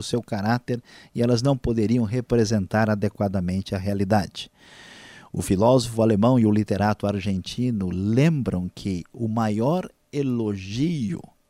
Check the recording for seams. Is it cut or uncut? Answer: uncut